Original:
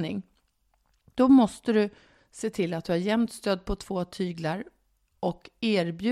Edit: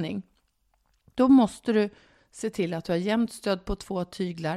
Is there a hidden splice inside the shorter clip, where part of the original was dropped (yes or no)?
no